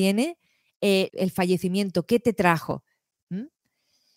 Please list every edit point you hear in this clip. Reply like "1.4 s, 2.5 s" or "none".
1.1 s